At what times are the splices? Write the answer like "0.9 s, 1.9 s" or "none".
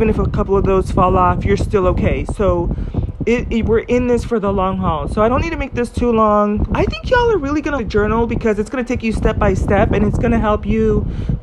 6.7 s, 7.8 s